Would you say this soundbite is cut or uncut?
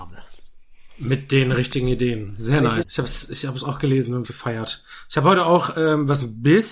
cut